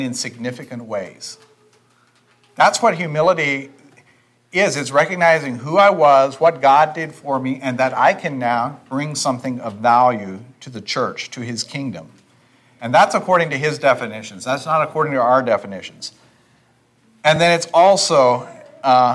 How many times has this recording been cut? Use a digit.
0